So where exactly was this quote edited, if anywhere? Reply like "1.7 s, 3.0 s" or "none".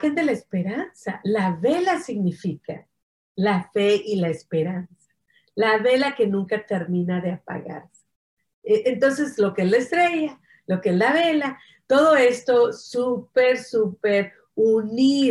none